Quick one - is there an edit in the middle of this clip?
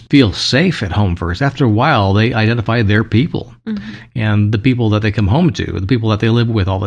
no; 0 cuts

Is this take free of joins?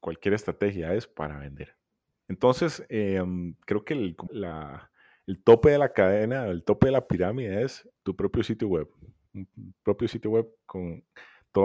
no; 2 cuts; at 2.2 s, 4.3 s

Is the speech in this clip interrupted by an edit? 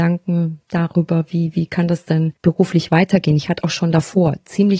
yes; 1 cut; at 2.4 s

